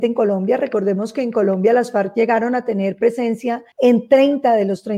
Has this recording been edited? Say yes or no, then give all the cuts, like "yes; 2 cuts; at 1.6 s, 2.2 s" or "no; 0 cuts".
yes; 1 cut; at 3.7 s